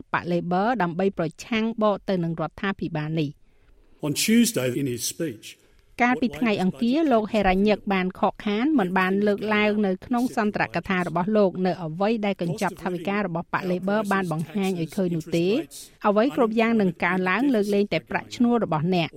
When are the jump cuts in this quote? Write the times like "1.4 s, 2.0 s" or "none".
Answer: 4.7 s, 15.9 s